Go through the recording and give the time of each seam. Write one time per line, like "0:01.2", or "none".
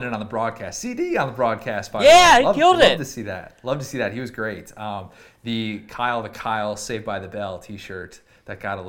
none